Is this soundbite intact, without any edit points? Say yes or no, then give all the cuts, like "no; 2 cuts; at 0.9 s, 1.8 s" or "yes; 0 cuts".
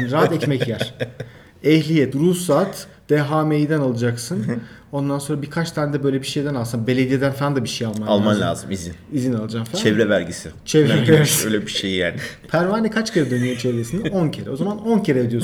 yes; 0 cuts